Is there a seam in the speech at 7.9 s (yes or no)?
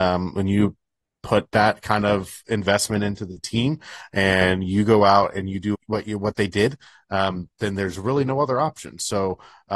no